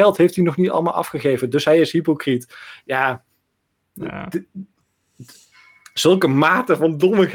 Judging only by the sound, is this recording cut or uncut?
uncut